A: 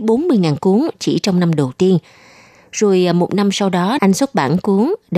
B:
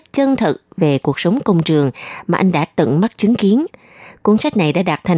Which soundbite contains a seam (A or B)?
A